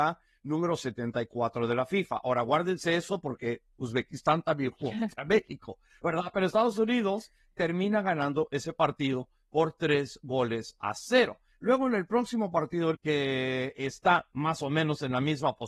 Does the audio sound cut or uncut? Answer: cut